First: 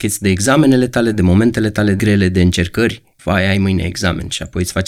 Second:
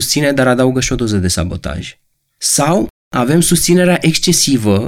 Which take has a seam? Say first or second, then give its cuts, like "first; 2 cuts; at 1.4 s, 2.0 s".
first; 1 cut; at 3.2 s